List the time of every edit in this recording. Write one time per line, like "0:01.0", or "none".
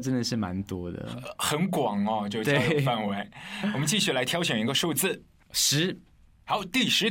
none